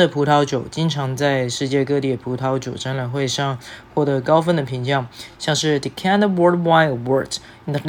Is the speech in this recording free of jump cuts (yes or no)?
yes